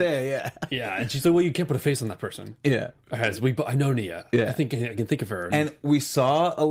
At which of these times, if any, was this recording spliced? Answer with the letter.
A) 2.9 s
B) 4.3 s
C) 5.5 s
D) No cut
C